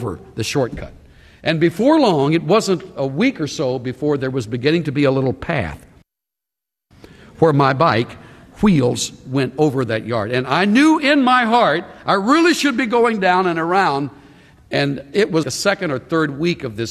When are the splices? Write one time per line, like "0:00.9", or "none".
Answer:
0:15.4